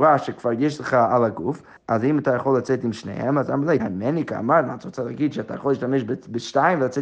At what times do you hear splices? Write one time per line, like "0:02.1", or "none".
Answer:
0:01.8
0:03.8